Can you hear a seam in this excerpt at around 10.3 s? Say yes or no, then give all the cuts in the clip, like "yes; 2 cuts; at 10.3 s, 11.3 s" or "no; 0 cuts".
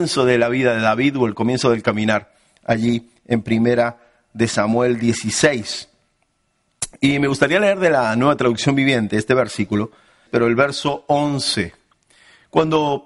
yes; 1 cut; at 10.3 s